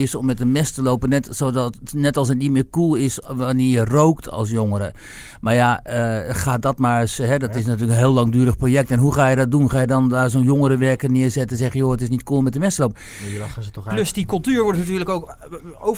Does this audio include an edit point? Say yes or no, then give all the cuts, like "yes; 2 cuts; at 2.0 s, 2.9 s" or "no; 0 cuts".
no; 0 cuts